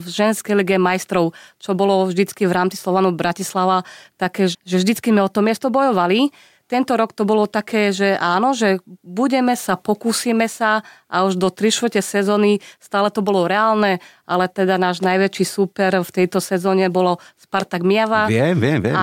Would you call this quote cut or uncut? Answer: cut